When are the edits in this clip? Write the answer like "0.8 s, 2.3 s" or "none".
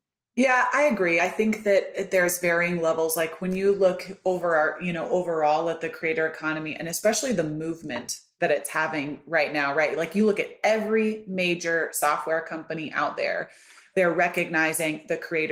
none